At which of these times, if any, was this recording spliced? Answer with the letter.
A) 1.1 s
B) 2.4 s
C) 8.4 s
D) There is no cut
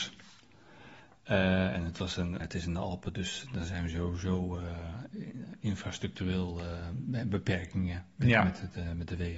B